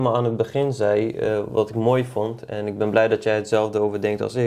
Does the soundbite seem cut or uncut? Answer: uncut